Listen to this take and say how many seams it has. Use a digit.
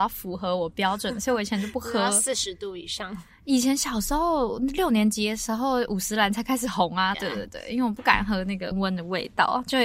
2